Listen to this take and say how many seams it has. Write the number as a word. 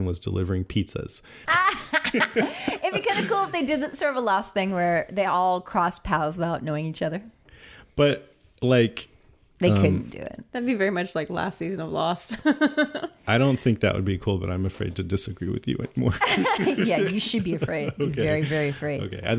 one